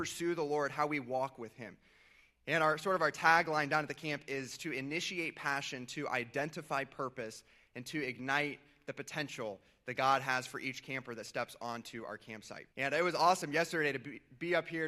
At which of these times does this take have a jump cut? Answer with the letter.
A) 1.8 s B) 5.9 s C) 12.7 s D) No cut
C